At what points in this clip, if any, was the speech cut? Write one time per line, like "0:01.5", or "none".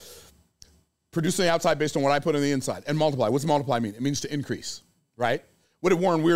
none